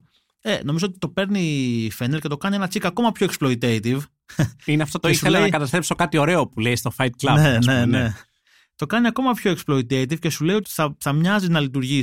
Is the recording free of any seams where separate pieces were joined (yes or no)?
no